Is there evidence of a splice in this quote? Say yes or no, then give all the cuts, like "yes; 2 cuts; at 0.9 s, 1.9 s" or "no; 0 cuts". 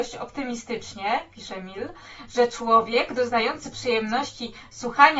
no; 0 cuts